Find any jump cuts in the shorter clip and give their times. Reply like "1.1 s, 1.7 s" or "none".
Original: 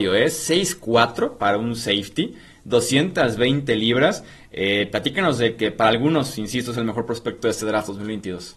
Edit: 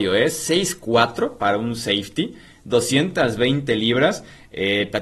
none